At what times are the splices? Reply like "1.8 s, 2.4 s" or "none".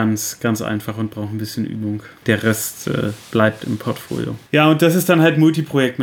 2.2 s, 4.5 s